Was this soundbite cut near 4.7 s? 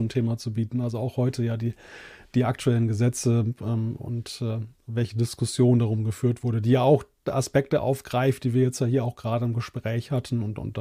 no; 0 cuts

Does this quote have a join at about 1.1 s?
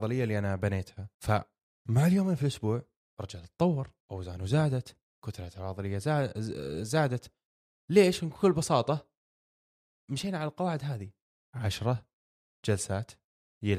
yes; 2 cuts; at 1.1 s, 4.0 s

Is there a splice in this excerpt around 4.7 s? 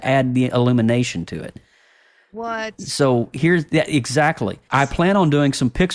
yes; 1 cut; at 4.7 s

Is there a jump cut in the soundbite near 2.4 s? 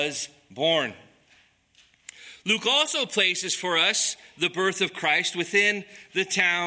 no; 0 cuts

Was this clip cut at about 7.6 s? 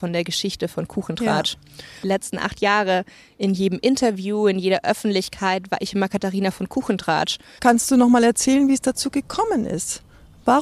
yes; 2 cuts; at 2.0 s, 7.6 s

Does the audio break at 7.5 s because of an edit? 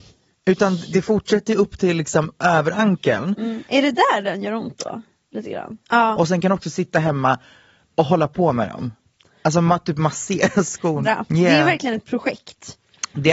no; 2 cuts; at 5.8 s, 11.0 s

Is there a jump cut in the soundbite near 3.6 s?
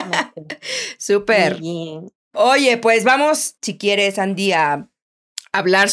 yes; 1 cut; at 3.6 s

